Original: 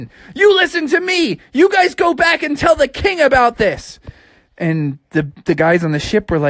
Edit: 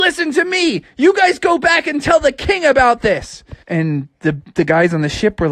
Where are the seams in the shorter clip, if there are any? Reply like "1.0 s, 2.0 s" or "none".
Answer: 3.6 s

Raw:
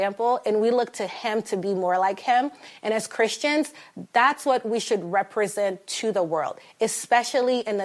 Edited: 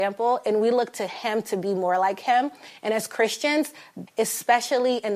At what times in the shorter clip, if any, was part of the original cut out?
4.1 s

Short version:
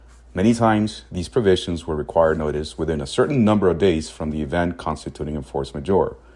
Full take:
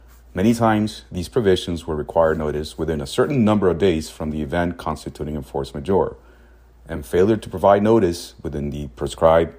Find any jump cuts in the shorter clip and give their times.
none

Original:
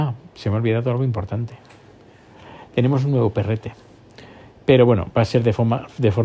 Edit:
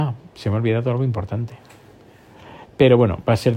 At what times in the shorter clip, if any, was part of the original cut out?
2.7 s

